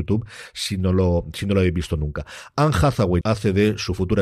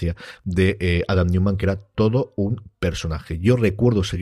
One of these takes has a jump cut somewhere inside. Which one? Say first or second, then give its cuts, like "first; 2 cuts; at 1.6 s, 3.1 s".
first; 1 cut; at 3.2 s